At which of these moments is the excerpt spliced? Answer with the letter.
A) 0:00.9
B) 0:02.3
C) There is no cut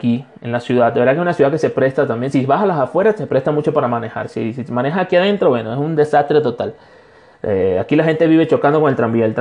C